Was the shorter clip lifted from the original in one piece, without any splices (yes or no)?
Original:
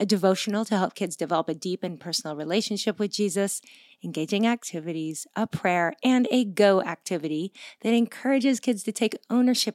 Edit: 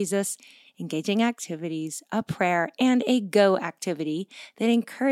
yes